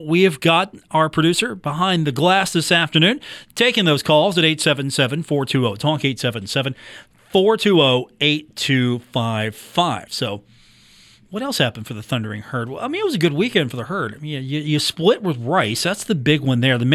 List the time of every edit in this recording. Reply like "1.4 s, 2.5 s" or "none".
none